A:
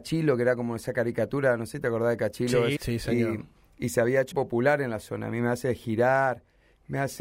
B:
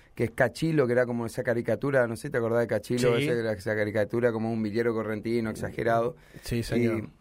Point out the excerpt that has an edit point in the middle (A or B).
A